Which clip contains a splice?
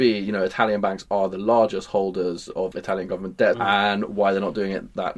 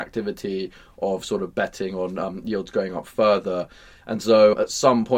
first; 1 cut; at 3.5 s

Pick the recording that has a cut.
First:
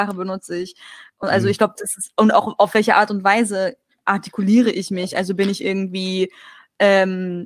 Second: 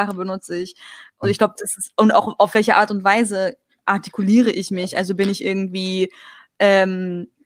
second; 1 cut; at 1.2 s

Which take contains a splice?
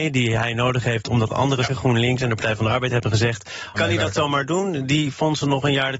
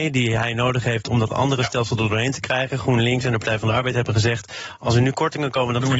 first; 2 cuts; at 1.7 s, 3.7 s

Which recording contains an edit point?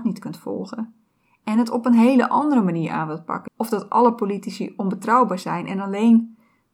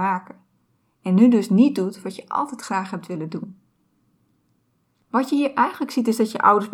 first; 1 cut; at 3.5 s

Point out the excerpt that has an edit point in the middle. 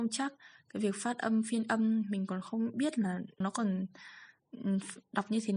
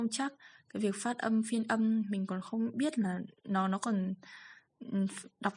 first; 1 cut; at 3.4 s

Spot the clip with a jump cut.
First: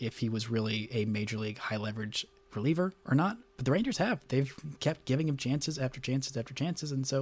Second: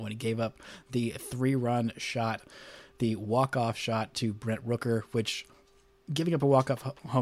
second; 1 cut; at 6.0 s

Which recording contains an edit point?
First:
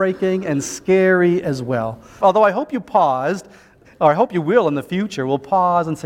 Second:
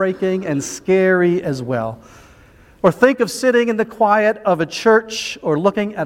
first; 2 cuts; at 2.2 s, 3.8 s

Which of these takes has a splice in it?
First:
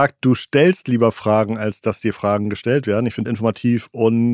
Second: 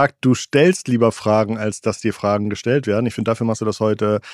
first; 1 cut; at 3.3 s

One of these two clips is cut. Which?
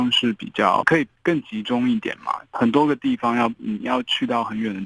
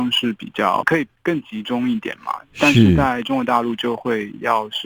first; 1 cut; at 2.5 s

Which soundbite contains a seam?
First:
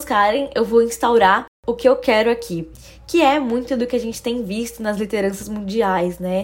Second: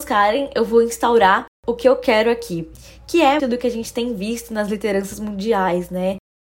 second; 1 cut; at 3.4 s

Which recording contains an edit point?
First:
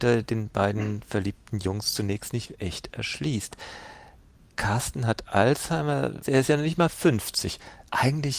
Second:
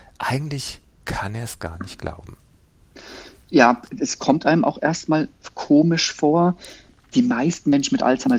first; 1 cut; at 6.2 s

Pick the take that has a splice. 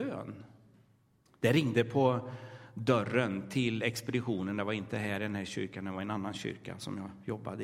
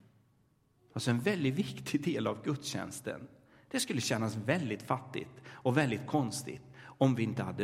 first; 1 cut; at 1.3 s

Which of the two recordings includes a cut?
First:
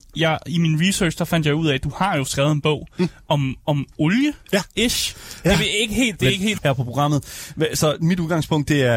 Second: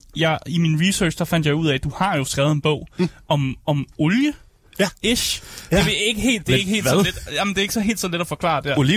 first; 2 cuts; at 4.4 s, 6.6 s

